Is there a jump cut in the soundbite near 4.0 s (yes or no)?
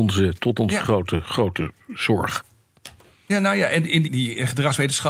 yes